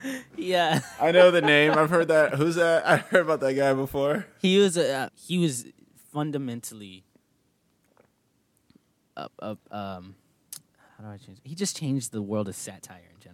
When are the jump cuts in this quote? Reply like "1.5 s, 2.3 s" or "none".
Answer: 5.1 s, 10.9 s